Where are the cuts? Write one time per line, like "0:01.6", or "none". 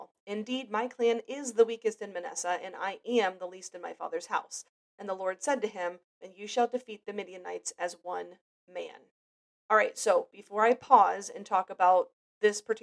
0:06.2